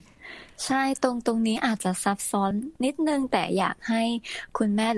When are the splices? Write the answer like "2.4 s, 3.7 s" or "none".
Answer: none